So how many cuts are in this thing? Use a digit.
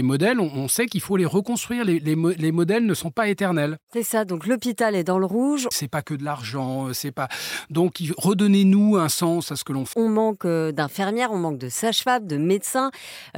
2